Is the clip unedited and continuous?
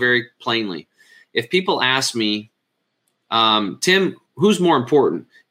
yes; 0 cuts

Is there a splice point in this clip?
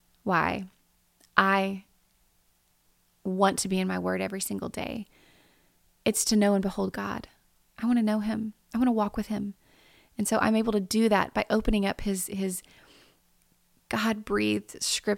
no; 0 cuts

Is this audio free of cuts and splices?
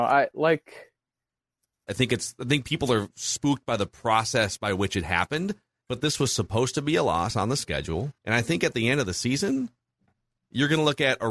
no; 3 cuts; at 1.9 s, 5.8 s, 8.2 s

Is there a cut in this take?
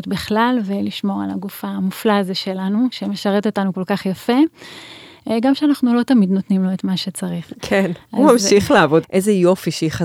yes; 1 cut; at 9.0 s

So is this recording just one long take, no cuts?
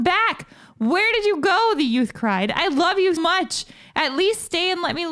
no; 1 cut; at 3.2 s

